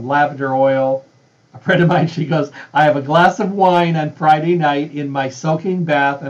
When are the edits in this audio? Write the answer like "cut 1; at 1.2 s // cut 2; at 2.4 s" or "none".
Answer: cut 1; at 1.4 s